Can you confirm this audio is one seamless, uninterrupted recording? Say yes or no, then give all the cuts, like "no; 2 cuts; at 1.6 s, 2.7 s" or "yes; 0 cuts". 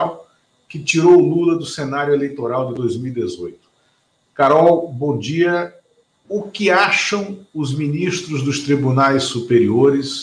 no; 1 cut; at 6.2 s